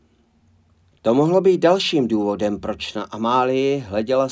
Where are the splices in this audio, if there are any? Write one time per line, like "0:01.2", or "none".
0:01.0